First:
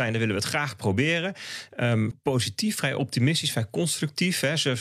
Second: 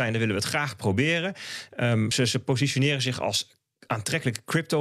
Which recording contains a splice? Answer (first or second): first